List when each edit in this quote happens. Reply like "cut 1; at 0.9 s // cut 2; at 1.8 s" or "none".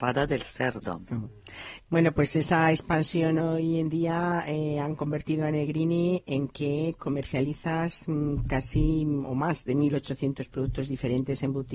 cut 1; at 1.8 s